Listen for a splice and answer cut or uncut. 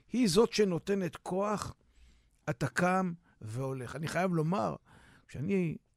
uncut